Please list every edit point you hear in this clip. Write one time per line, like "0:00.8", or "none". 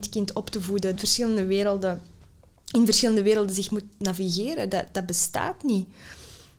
0:01.0